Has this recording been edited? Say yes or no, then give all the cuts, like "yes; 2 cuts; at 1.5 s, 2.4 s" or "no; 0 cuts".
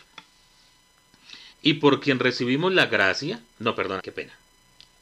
yes; 2 cuts; at 1.5 s, 4.0 s